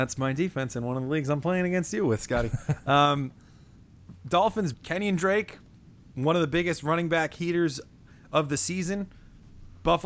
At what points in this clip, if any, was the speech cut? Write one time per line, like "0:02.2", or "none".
0:04.7

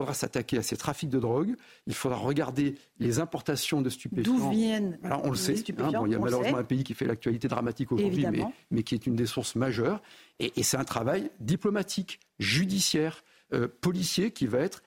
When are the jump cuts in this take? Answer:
none

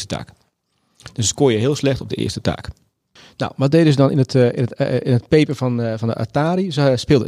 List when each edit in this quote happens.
none

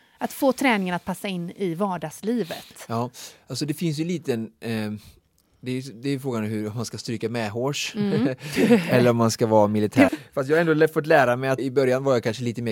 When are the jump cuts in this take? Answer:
0:10.1
0:11.6

